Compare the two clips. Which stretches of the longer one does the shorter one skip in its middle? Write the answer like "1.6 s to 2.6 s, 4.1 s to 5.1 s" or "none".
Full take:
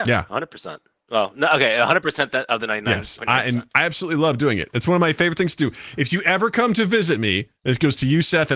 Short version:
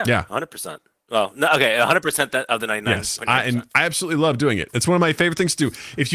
none